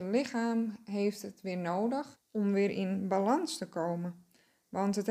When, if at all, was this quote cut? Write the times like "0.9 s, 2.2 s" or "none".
2.2 s